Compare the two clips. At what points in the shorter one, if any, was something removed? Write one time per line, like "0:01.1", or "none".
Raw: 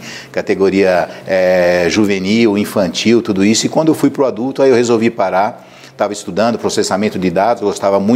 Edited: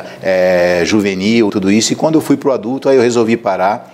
0:01.5